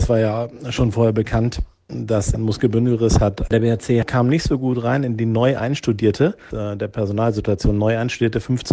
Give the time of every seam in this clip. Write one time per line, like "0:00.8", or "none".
0:02.3
0:03.5
0:06.5